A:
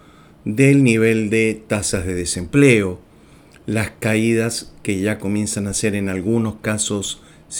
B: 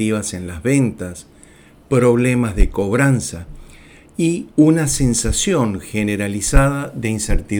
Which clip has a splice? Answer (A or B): B